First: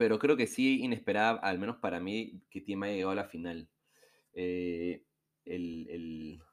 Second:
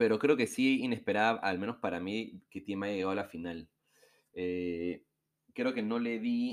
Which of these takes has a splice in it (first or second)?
first